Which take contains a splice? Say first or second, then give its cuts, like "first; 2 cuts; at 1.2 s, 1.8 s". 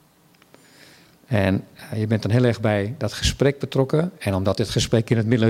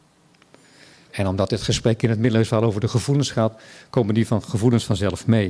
second; 1 cut; at 1.1 s